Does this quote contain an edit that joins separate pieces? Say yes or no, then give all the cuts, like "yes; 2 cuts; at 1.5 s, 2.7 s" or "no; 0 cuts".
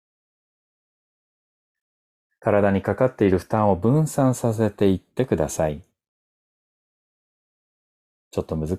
no; 0 cuts